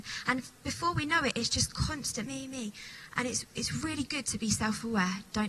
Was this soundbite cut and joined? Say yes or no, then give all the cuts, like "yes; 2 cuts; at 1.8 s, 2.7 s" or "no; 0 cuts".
yes; 1 cut; at 2.3 s